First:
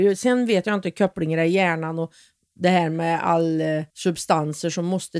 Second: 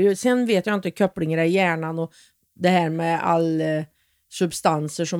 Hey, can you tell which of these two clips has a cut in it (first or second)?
first